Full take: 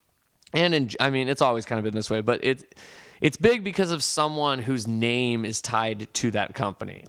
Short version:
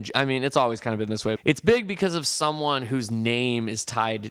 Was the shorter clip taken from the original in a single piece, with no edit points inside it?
no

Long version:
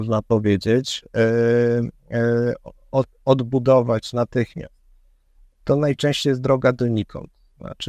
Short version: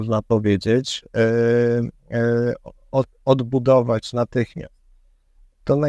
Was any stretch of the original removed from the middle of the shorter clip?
no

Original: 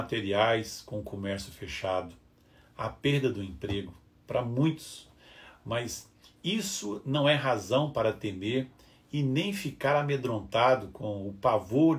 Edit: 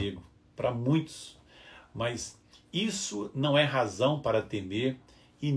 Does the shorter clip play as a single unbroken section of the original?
yes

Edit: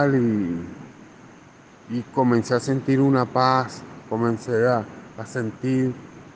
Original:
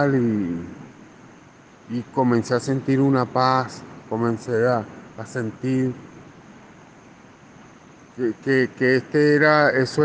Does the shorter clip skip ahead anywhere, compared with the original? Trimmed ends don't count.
no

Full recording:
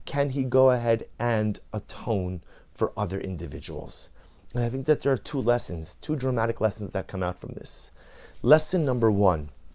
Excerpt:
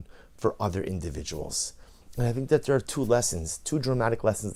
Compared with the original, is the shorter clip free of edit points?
yes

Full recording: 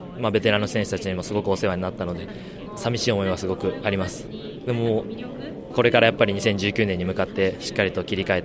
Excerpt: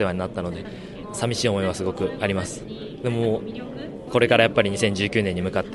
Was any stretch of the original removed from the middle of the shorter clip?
no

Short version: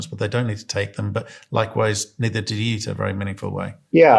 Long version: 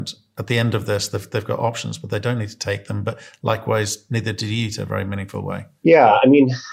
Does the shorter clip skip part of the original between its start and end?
no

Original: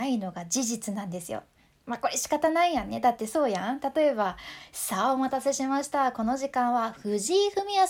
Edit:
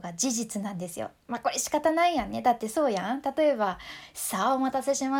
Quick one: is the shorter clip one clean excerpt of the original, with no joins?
no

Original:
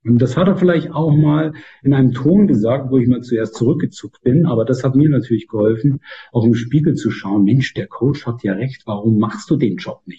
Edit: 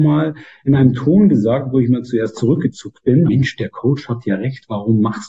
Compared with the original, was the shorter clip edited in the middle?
yes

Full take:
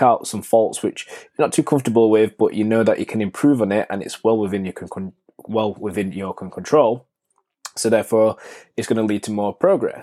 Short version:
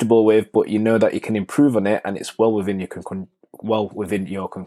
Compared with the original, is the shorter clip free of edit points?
yes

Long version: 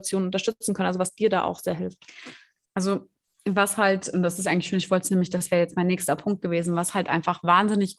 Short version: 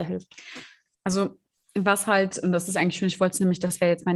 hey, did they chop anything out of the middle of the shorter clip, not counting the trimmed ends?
no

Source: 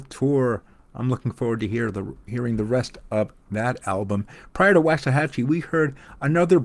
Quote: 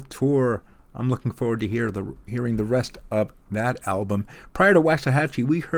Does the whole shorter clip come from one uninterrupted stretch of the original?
yes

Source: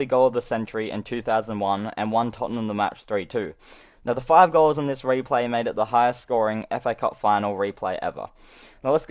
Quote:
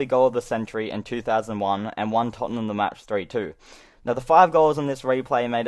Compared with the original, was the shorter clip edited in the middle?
no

